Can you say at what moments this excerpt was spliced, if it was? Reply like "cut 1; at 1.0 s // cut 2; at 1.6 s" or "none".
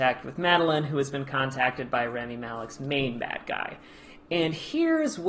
none